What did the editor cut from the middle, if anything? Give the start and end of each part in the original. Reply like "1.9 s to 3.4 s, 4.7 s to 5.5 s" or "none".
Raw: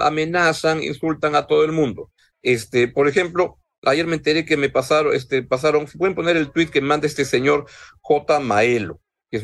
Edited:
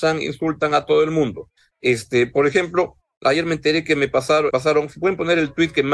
5.1 s to 5.5 s